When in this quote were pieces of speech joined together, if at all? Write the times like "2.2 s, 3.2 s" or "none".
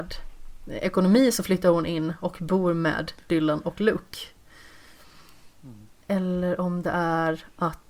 none